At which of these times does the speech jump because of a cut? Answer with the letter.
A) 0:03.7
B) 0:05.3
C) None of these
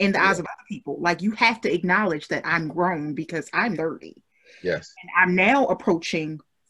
A